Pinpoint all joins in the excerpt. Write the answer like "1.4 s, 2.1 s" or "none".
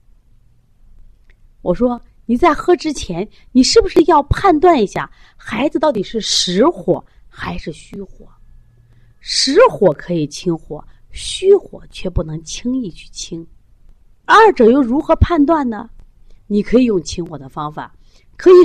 14.2 s, 16.4 s